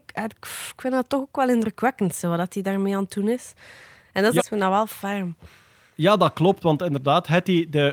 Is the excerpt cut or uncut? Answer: cut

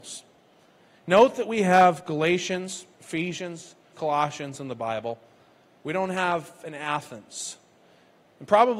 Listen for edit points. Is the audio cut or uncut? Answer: cut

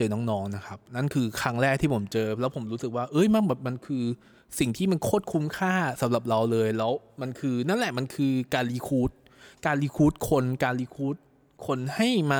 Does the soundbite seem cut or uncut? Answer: uncut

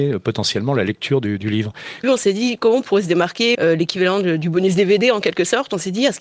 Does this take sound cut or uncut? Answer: cut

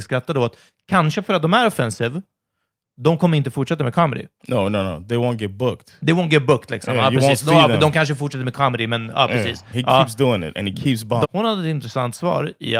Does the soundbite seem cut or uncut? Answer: cut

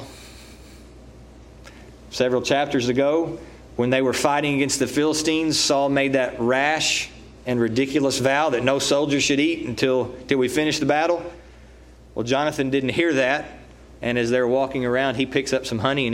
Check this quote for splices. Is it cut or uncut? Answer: uncut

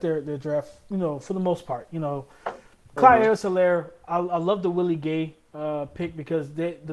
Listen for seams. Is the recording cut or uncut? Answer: uncut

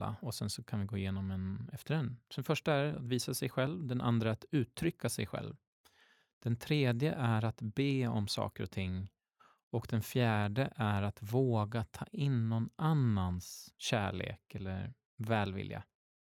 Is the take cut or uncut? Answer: uncut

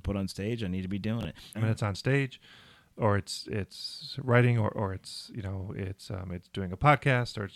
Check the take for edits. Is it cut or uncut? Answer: cut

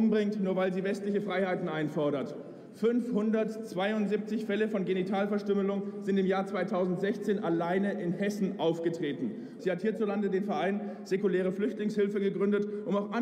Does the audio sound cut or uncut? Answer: cut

